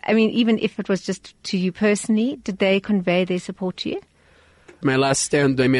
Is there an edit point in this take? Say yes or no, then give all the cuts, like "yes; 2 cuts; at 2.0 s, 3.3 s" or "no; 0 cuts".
yes; 1 cut; at 4.8 s